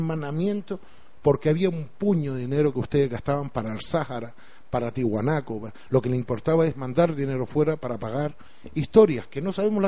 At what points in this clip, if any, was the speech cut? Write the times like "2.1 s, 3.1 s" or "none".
5.9 s